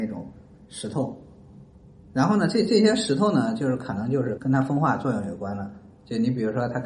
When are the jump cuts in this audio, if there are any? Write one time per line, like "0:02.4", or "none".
0:02.0
0:04.4